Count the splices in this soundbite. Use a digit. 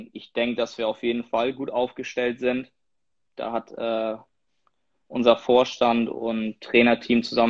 0